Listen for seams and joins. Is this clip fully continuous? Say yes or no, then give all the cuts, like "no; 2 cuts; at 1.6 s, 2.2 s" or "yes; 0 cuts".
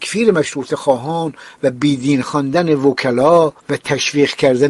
no; 1 cut; at 3.6 s